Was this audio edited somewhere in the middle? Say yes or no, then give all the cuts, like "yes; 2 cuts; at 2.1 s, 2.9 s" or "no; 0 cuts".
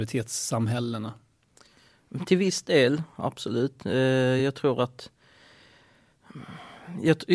no; 0 cuts